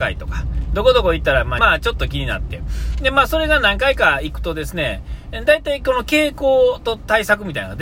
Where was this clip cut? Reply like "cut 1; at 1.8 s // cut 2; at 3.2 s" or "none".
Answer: cut 1; at 1.6 s